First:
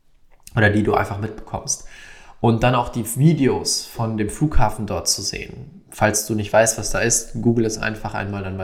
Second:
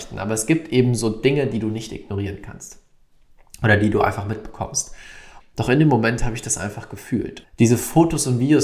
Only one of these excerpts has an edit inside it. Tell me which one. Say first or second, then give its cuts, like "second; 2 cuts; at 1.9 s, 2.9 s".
second; 2 cuts; at 5.4 s, 7.4 s